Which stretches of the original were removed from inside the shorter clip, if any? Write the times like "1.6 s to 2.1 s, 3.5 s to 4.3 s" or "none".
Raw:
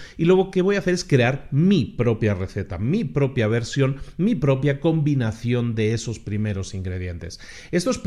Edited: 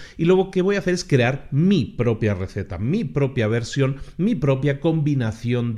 none